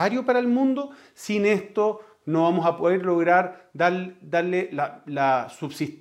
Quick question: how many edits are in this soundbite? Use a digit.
0